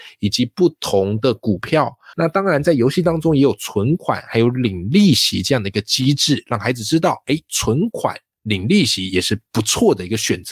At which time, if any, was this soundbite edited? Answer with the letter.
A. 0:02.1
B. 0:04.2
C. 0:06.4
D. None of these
A